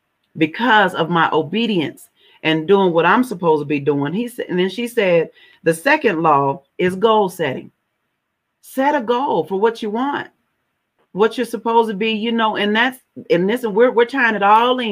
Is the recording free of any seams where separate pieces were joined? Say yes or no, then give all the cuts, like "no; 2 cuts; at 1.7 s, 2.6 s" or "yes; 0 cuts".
yes; 0 cuts